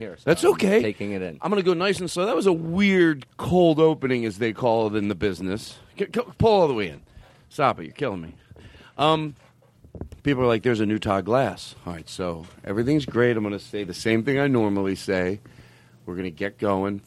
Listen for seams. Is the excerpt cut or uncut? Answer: cut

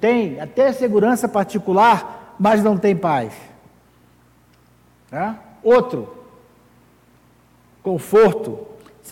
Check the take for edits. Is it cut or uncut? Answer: uncut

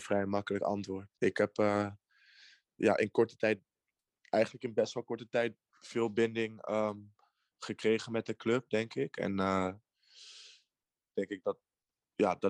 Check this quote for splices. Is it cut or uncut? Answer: cut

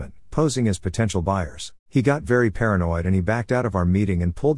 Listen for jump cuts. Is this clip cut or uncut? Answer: cut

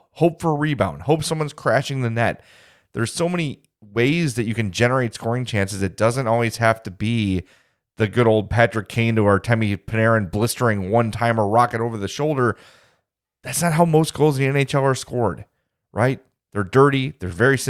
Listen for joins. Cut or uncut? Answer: uncut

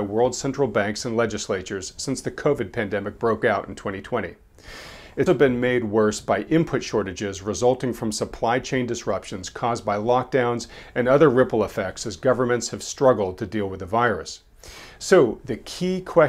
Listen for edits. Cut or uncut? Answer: cut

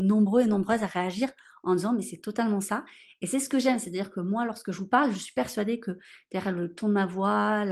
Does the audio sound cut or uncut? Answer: uncut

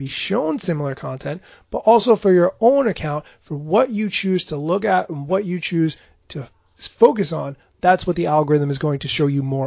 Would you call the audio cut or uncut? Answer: uncut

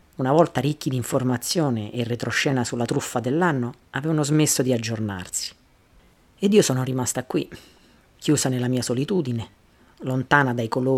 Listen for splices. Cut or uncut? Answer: uncut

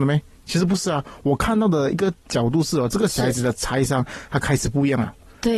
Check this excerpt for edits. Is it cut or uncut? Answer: uncut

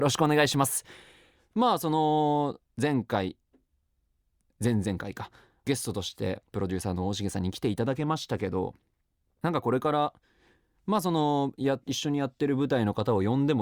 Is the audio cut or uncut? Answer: cut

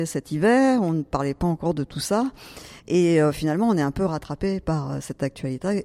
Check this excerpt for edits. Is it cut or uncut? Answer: uncut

